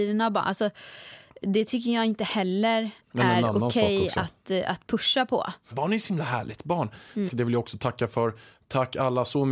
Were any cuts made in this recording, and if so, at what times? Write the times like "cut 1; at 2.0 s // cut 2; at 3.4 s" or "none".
cut 1; at 5.7 s // cut 2; at 7.3 s